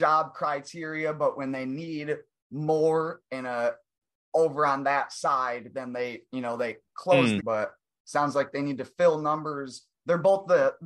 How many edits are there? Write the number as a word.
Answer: one